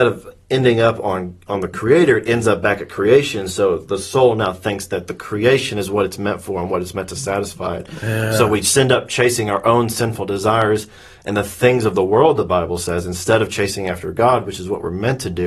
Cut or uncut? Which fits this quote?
uncut